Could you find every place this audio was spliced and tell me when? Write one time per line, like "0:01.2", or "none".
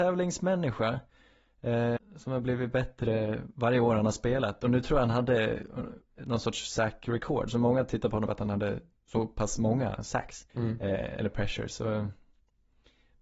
0:02.0
0:08.3
0:10.5